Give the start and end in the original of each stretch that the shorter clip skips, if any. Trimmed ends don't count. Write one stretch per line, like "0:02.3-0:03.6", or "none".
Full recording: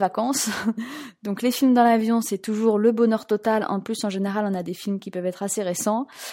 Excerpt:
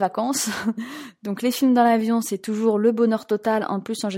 none